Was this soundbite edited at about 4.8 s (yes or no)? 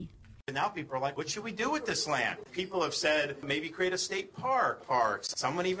yes